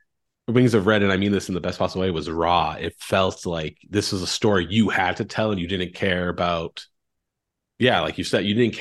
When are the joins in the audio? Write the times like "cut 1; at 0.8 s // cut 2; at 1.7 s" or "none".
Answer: none